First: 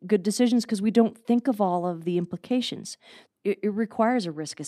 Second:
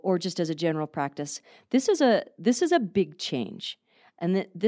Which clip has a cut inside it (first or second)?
first